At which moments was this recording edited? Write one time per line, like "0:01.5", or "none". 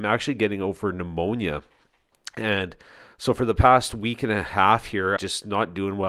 0:05.2